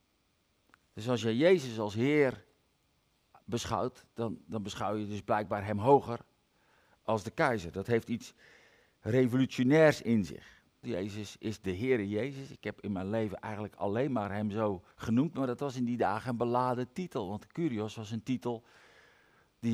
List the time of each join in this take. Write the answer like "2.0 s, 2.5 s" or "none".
10.8 s, 14.9 s